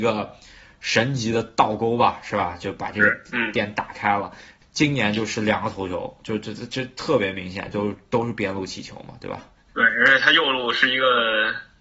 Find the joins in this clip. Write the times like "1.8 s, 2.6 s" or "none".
none